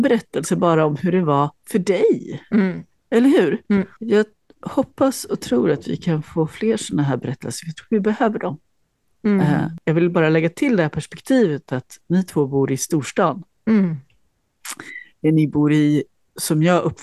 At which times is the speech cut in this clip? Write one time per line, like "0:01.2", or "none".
none